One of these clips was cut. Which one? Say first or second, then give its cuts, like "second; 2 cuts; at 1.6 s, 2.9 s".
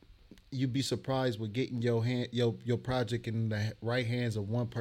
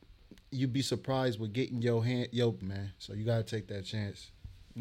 second; 1 cut; at 2.6 s